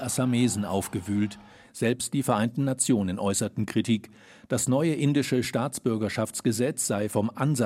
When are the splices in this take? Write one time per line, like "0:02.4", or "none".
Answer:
0:01.6